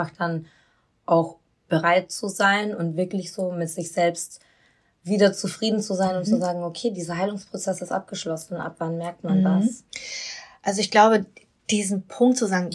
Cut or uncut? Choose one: uncut